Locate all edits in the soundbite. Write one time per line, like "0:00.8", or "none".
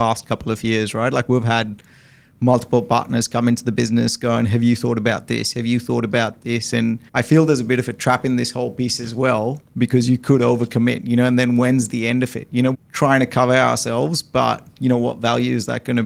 0:07.1
0:12.7